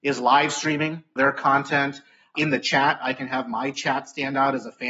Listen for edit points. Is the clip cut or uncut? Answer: uncut